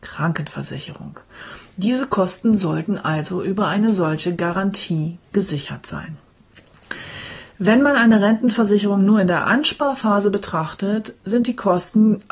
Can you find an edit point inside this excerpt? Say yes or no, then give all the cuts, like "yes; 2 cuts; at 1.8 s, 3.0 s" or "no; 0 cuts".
no; 0 cuts